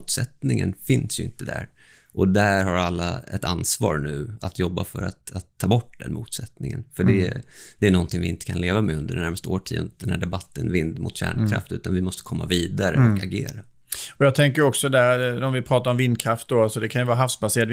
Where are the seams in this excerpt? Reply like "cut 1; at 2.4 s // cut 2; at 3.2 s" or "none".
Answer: none